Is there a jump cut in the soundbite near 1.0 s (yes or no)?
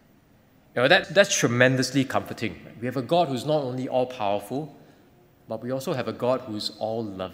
yes